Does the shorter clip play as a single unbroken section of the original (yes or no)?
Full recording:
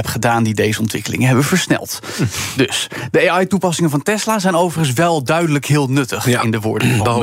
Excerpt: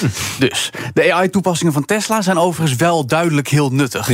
yes